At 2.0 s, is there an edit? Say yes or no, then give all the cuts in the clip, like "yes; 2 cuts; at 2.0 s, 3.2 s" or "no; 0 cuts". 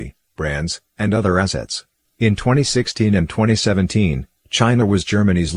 yes; 1 cut; at 2.0 s